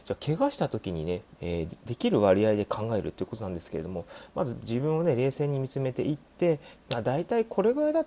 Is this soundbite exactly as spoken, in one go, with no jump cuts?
no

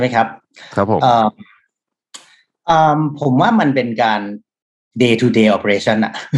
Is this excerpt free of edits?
yes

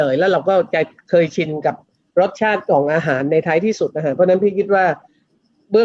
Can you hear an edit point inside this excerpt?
no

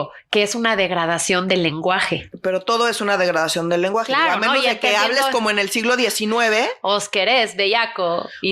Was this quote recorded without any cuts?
yes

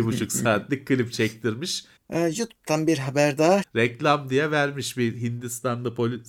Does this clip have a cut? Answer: yes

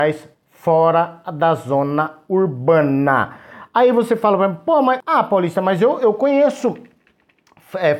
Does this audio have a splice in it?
no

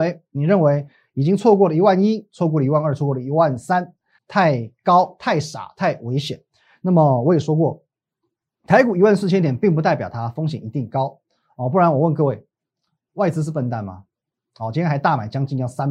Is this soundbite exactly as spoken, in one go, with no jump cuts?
no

